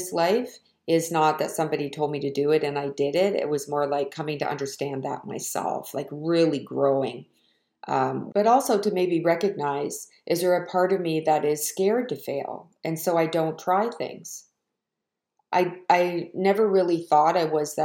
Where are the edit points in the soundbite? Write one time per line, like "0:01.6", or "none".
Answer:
0:08.3